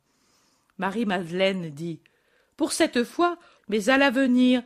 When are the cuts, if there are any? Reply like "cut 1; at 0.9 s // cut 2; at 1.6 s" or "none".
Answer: cut 1; at 3.6 s